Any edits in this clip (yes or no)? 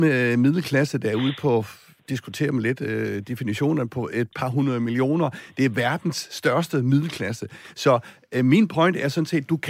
no